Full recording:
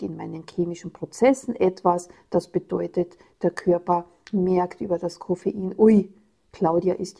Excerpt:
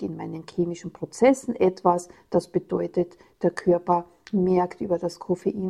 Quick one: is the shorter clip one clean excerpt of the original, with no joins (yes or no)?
yes